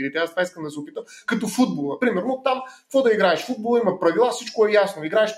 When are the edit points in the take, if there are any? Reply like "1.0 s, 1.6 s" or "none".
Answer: none